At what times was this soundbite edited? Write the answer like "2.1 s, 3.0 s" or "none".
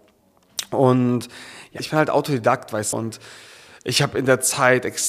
1.8 s, 2.9 s